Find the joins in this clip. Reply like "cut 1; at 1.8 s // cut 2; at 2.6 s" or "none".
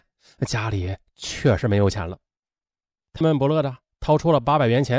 cut 1; at 3.2 s